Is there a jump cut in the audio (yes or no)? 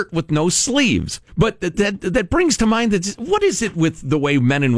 yes